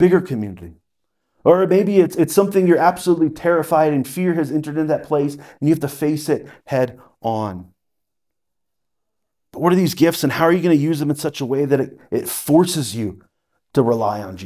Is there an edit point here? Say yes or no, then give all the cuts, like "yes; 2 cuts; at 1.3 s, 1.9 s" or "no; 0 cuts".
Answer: no; 0 cuts